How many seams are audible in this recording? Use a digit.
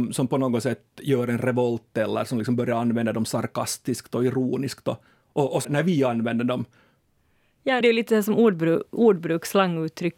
2